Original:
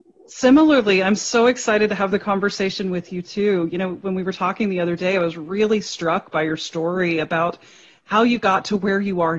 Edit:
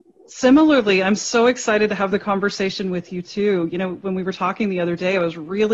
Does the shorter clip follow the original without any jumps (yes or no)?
yes